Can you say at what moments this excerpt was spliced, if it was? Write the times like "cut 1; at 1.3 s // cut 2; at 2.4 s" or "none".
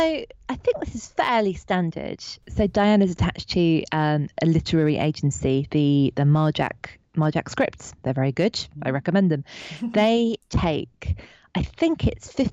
none